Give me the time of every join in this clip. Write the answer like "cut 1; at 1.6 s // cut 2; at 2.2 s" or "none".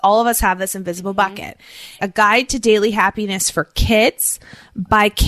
cut 1; at 2.0 s